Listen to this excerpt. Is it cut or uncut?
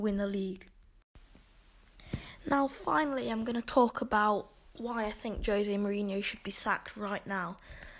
uncut